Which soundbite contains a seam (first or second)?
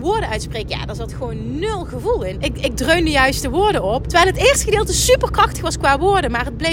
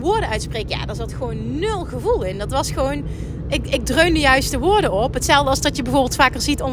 first